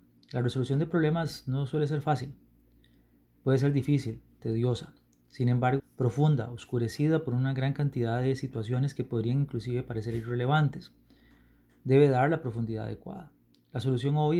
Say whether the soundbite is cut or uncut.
cut